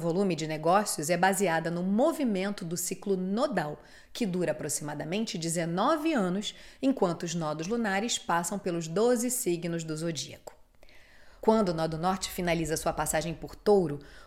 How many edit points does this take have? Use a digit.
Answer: 1